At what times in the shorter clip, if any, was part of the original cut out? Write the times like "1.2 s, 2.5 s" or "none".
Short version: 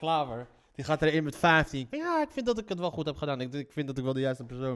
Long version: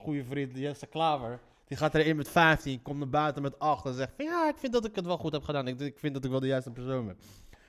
1.9 s